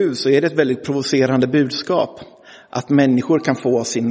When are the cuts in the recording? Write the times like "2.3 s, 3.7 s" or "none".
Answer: none